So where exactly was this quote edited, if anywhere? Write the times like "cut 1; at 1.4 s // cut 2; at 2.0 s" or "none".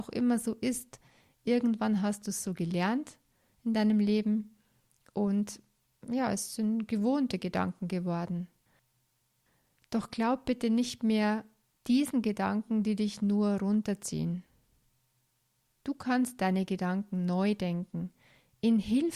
none